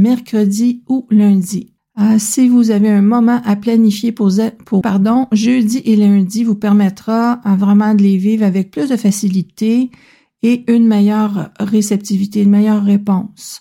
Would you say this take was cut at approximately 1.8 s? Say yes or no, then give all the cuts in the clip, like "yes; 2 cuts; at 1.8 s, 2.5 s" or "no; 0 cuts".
yes; 2 cuts; at 1.8 s, 4.8 s